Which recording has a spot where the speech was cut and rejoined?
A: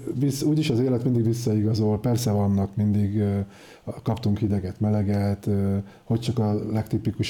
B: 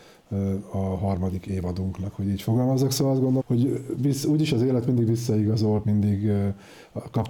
B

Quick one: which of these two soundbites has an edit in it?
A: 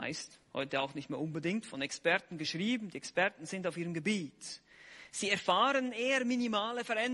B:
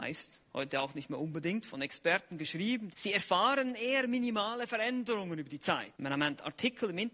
B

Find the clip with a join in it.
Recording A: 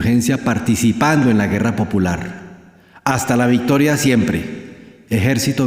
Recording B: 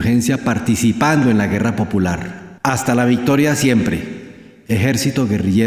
B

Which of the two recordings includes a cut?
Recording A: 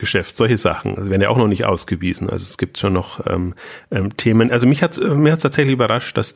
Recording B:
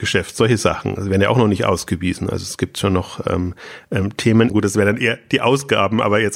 B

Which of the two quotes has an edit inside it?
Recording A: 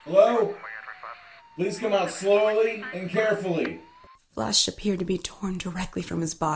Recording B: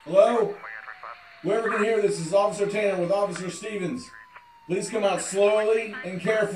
A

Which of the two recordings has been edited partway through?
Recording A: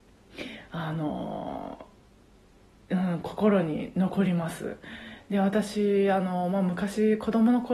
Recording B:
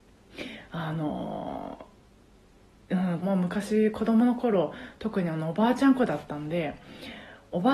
B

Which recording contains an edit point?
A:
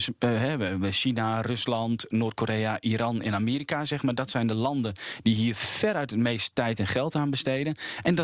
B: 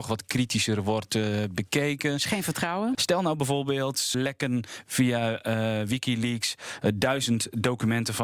B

